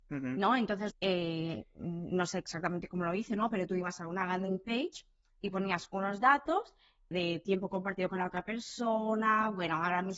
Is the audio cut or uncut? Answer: cut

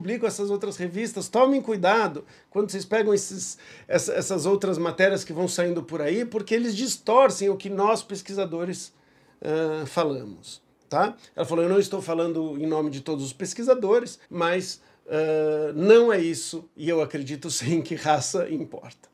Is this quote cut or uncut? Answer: cut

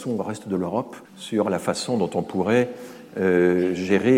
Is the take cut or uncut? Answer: cut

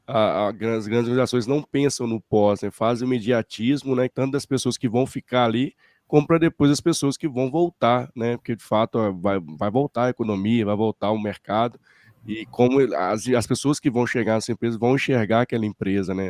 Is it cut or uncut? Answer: cut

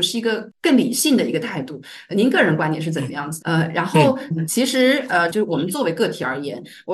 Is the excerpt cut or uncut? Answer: cut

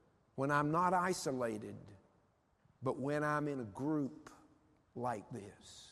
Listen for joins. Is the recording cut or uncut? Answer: uncut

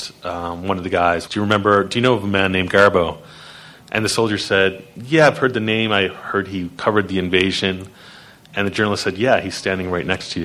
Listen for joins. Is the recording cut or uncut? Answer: cut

